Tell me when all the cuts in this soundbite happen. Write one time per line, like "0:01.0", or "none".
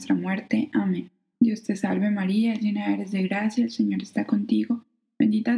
0:01.4

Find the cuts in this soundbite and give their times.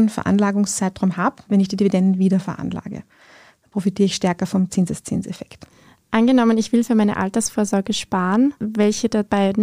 0:01.5

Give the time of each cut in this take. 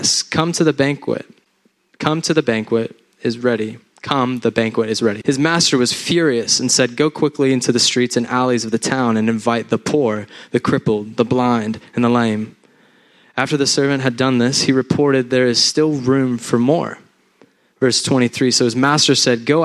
0:05.2

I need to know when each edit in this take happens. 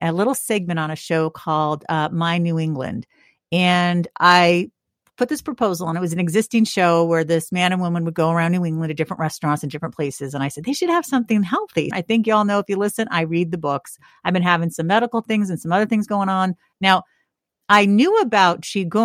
0:11.9
0:16.7

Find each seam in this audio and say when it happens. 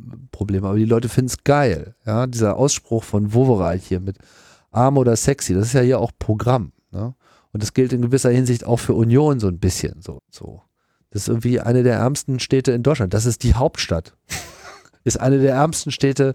0:10.2

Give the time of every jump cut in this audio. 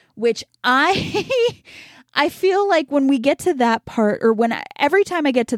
none

